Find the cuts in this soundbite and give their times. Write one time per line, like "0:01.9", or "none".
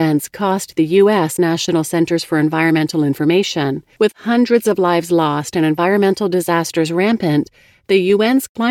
0:01.4
0:03.9